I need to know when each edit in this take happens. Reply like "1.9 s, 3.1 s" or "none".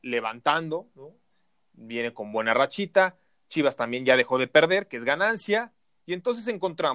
none